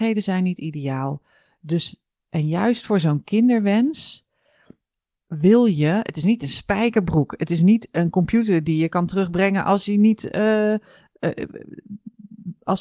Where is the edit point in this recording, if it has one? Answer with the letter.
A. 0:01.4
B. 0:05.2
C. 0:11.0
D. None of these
D